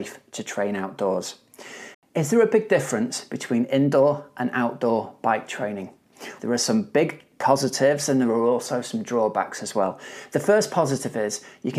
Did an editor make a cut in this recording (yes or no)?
yes